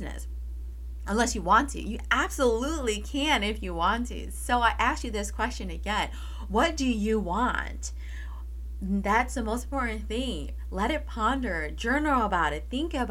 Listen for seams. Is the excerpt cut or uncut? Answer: uncut